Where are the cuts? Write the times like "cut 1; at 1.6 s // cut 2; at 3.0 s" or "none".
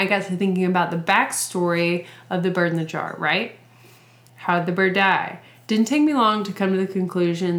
cut 1; at 4.3 s